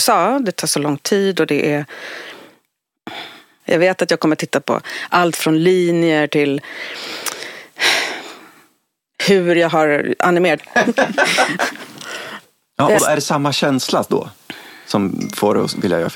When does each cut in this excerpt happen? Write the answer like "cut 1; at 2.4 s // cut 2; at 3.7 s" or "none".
cut 1; at 3.6 s // cut 2; at 10.6 s // cut 3; at 13.0 s